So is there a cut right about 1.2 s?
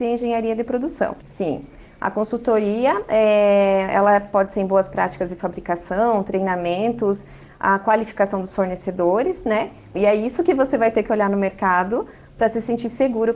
yes; 2 cuts; at 1.2 s, 9.9 s

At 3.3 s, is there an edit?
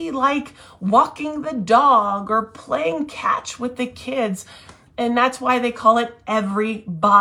no; 1 cut; at 4.9 s

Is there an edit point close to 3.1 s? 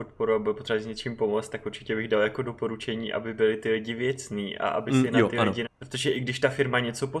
no; 1 cut; at 5.6 s

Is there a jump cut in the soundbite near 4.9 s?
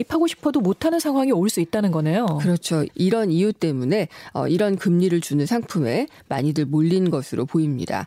no; 1 cut; at 2.9 s

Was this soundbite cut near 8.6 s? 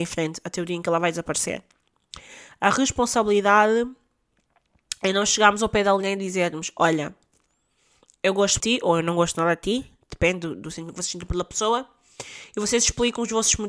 yes; 1 cut; at 8.6 s

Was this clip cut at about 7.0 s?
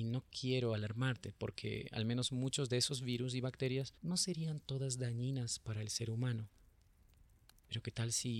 no; 1 cut; at 4.0 s

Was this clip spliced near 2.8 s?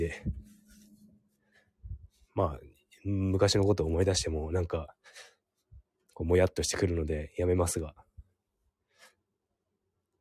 no; 0 cuts

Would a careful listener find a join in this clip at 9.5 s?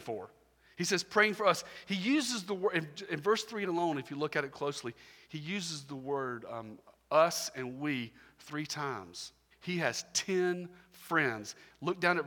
yes; 1 cut; at 9.5 s

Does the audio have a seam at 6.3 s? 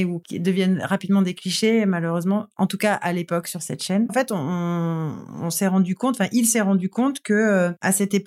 no; 1 cut; at 4.1 s

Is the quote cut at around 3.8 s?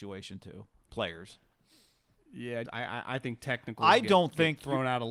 no; 1 cut; at 2.6 s

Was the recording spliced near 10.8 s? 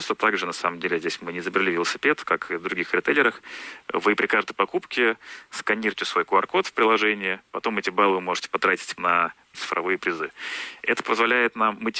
no; 0 cuts

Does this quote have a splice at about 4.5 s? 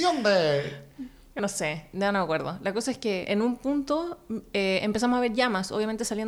no; 1 cut; at 1.4 s

